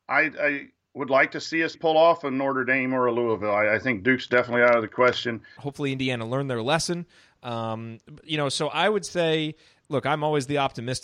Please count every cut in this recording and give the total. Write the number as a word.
two